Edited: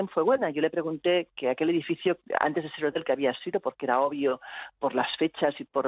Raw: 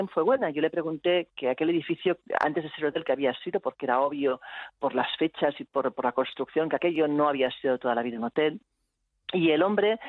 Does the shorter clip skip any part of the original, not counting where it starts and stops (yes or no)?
no